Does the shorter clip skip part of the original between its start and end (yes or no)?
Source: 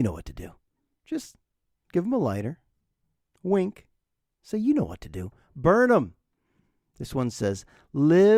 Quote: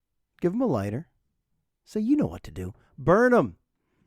yes